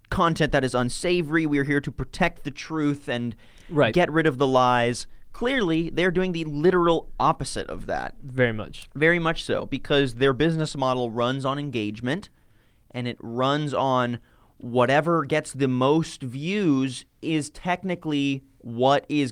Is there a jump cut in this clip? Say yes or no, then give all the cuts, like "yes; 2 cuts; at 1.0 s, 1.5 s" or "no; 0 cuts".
no; 0 cuts